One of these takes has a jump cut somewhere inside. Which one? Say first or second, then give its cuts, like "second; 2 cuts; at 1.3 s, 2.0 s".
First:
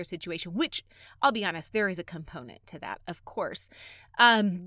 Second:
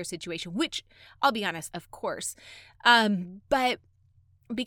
second; 1 cut; at 1.7 s